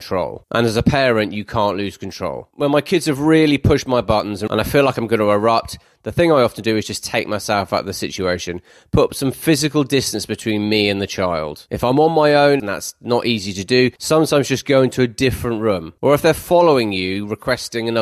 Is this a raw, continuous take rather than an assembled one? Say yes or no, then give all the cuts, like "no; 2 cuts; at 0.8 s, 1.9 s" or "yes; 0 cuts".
no; 1 cut; at 12.6 s